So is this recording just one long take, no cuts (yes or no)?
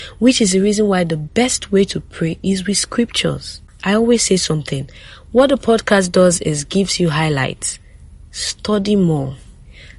no